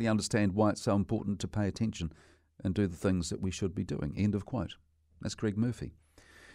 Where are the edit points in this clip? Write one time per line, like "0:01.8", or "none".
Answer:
none